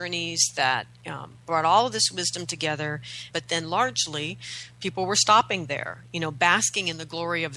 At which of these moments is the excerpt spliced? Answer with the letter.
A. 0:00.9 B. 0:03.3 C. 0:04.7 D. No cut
B